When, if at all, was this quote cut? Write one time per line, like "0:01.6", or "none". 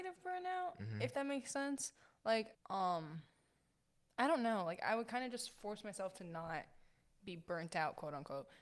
0:02.5